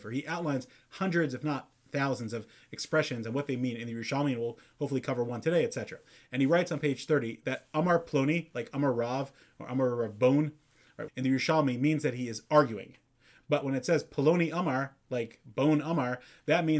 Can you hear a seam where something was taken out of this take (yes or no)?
yes